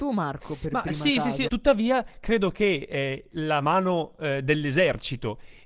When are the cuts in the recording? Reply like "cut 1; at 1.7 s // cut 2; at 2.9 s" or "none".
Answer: cut 1; at 1.5 s // cut 2; at 3.3 s